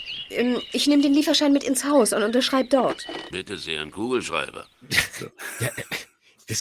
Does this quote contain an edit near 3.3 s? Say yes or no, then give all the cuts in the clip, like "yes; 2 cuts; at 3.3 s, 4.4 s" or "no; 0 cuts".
yes; 1 cut; at 3.3 s